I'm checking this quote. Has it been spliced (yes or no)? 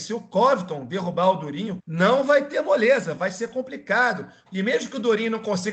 yes